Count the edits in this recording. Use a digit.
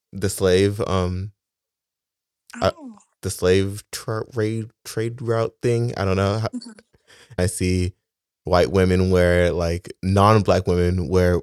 1